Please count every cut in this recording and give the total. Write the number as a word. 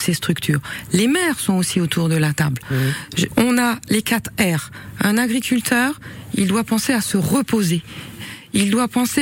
one